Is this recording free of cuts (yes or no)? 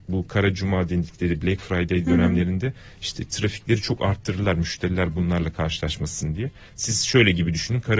yes